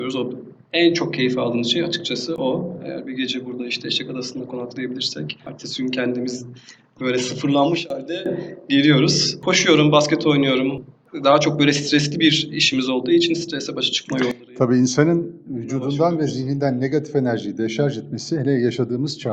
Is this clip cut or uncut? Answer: uncut